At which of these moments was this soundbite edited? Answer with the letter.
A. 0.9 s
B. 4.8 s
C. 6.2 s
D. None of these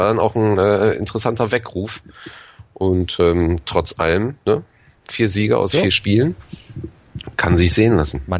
D